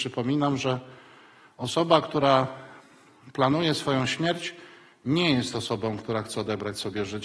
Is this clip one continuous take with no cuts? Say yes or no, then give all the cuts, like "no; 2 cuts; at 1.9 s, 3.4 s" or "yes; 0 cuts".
yes; 0 cuts